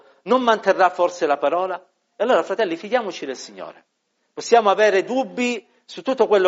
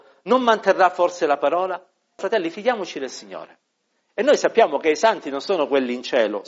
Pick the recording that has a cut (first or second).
second